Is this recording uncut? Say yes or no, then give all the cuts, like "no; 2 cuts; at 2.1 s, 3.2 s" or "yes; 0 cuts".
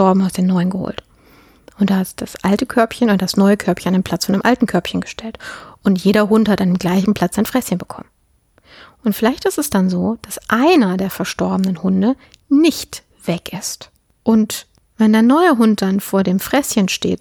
yes; 0 cuts